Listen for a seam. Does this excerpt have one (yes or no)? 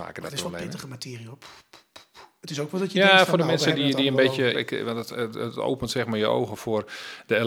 yes